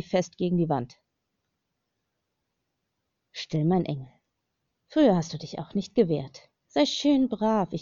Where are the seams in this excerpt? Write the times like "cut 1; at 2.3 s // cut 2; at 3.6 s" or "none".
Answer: none